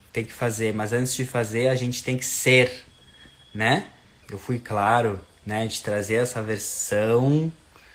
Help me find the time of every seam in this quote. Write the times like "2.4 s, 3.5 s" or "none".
4.2 s